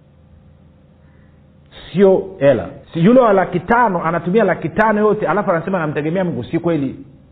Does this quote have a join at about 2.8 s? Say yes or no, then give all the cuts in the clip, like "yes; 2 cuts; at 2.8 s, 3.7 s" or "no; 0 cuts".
yes; 1 cut; at 2.8 s